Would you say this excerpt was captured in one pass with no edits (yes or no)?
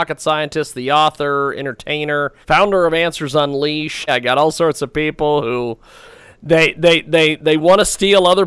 no